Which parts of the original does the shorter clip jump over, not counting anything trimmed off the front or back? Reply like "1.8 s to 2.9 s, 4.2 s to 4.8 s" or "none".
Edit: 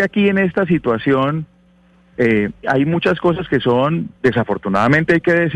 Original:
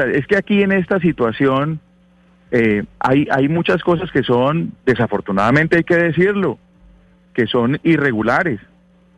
3.0 s to 3.3 s